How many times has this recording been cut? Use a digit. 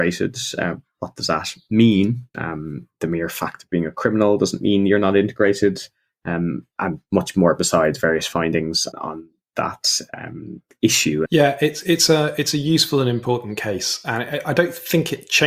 3